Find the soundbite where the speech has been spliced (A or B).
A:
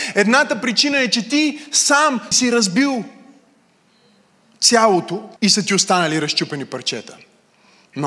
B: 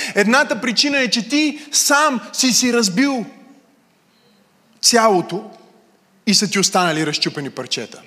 A